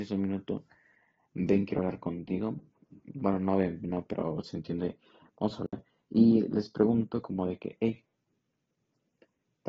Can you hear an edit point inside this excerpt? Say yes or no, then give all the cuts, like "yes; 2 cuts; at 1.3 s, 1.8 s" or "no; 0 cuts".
no; 0 cuts